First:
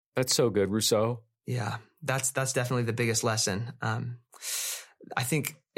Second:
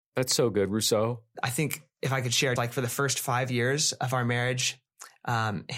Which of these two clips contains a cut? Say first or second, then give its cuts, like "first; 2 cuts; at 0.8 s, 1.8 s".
second; 2 cuts; at 1.3 s, 2.6 s